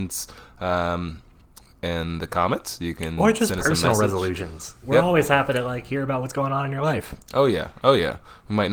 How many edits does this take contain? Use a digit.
0